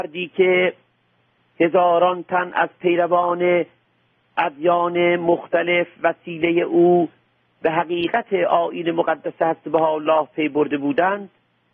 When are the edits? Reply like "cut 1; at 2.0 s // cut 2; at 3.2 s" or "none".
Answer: none